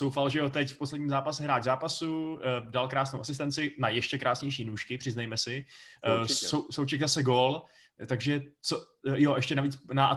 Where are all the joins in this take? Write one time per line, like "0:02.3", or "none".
0:07.9